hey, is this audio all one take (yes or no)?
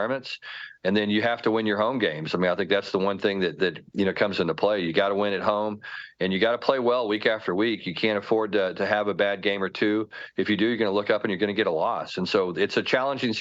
yes